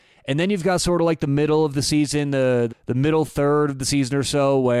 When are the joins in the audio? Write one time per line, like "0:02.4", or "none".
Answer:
0:02.7